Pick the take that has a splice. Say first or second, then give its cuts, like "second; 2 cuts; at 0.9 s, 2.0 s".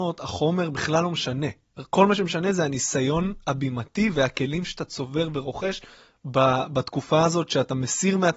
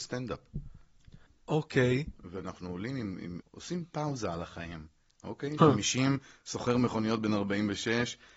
second; 3 cuts; at 1.3 s, 3.4 s, 5.6 s